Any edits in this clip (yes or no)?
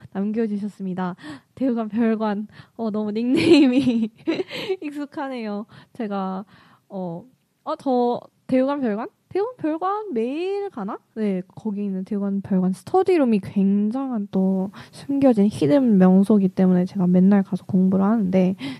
no